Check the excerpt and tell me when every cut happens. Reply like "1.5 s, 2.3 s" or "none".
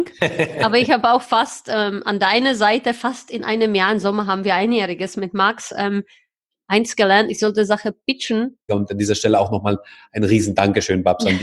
8.7 s